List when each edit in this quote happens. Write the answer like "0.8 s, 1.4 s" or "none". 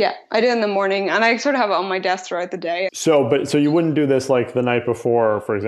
2.9 s